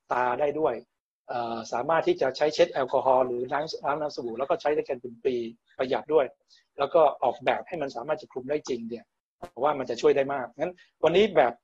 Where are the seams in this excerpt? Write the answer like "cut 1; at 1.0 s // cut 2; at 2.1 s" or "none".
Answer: cut 1; at 6.0 s